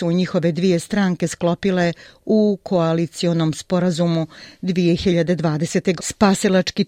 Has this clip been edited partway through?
yes; 1 cut; at 6.0 s

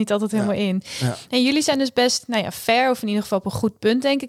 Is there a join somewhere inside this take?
no; 0 cuts

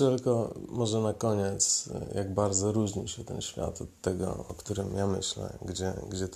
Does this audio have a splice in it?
no; 0 cuts

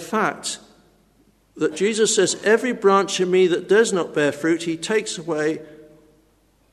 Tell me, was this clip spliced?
no; 0 cuts

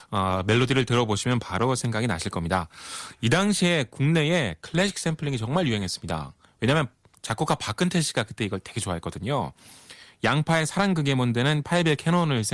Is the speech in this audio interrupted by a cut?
no; 0 cuts

